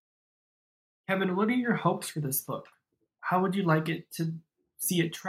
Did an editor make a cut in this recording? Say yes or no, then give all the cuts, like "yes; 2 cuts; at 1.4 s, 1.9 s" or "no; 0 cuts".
no; 0 cuts